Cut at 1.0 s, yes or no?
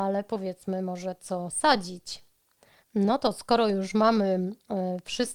no